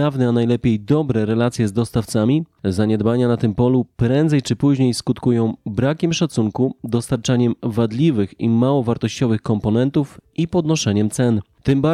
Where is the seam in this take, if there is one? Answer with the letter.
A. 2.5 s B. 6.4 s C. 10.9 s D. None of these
D